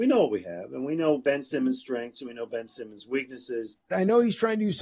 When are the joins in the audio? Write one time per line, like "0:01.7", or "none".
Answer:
0:03.9